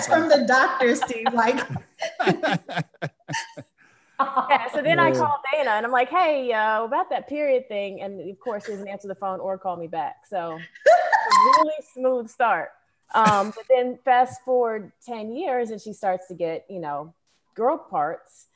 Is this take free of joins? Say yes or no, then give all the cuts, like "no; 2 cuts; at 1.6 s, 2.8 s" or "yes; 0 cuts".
no; 1 cut; at 13.0 s